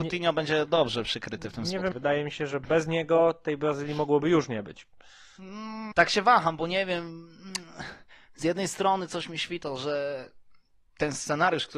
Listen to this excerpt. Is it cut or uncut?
cut